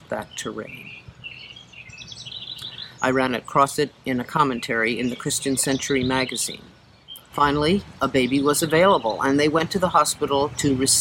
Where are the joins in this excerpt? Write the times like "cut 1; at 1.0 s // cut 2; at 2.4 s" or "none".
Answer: cut 1; at 3.0 s // cut 2; at 7.3 s